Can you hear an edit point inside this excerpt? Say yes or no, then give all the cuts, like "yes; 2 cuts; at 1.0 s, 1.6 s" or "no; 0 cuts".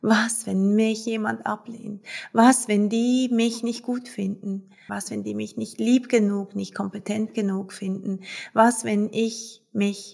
yes; 1 cut; at 4.9 s